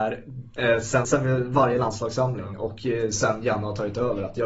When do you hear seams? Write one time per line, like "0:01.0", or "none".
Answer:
0:01.0